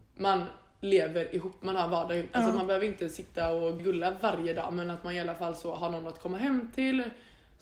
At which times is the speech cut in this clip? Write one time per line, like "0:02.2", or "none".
0:03.8